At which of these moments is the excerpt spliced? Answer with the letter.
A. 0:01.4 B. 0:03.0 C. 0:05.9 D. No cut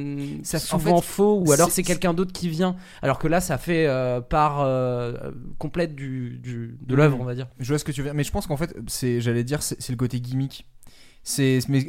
D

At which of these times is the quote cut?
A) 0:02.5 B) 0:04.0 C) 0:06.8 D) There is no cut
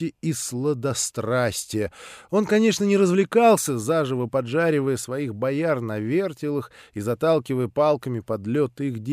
D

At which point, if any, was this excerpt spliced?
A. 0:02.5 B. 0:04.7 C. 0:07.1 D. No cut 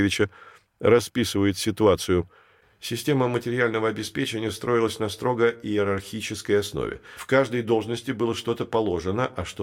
D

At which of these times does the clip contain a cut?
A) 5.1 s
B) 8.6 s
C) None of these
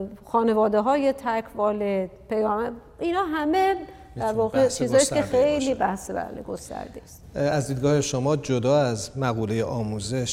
C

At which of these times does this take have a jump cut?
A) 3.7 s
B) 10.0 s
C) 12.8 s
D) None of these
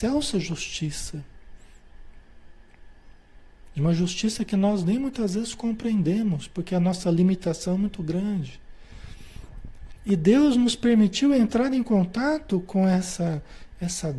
B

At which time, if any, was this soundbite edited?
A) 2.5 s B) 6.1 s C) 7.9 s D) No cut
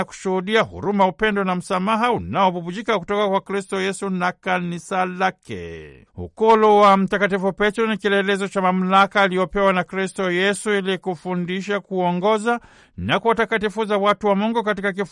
B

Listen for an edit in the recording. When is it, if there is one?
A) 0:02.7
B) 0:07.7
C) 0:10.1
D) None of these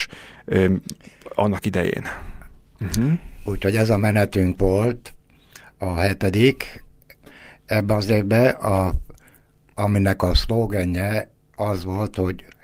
A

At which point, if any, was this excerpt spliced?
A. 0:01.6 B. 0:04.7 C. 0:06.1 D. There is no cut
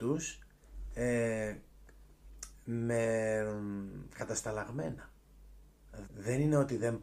C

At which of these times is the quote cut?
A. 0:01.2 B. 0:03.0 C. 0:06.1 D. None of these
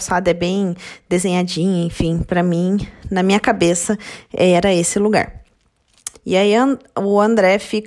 C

